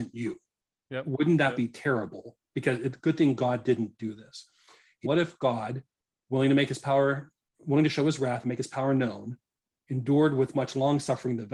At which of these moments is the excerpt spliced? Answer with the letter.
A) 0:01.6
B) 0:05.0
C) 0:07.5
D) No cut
B